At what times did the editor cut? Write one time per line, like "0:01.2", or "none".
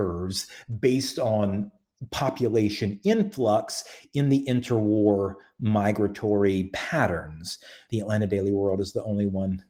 0:07.9